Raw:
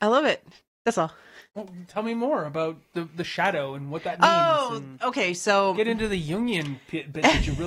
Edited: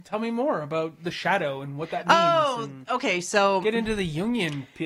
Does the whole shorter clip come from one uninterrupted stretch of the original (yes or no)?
no